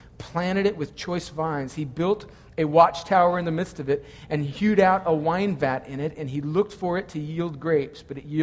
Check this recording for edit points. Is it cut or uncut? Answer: uncut